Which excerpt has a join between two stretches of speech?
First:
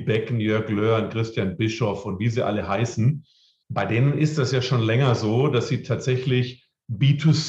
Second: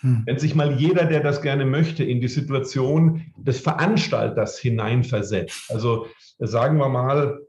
first; 1 cut; at 3.6 s

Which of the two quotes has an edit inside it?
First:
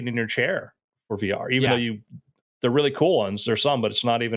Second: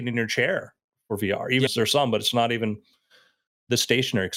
second; 1 cut; at 1.7 s

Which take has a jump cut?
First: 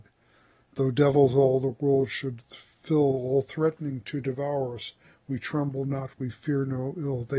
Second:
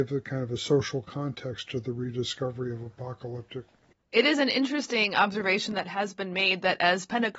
second; 1 cut; at 4.0 s

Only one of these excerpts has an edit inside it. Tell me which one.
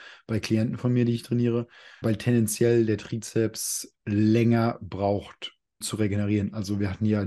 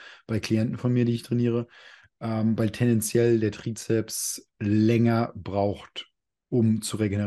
first; 2 cuts; at 2.0 s, 5.8 s

